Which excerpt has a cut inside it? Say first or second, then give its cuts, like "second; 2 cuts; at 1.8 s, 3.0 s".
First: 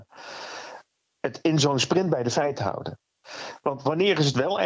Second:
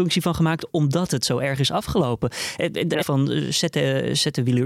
second; 1 cut; at 3.0 s